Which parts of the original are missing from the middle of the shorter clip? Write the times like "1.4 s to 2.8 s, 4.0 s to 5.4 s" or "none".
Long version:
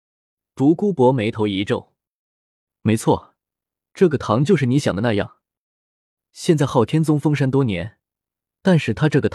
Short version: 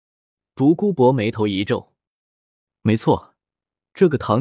none